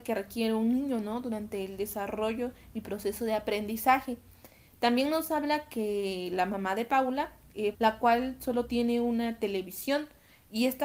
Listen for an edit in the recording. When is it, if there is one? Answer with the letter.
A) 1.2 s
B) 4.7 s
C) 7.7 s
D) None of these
C